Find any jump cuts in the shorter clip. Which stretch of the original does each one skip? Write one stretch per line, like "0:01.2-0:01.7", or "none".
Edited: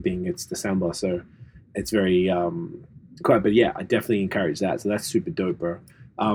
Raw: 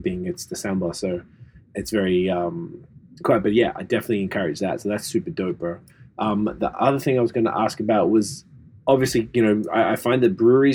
none